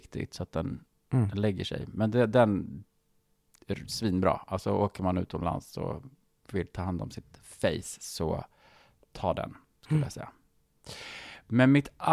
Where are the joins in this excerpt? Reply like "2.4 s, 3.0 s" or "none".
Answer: none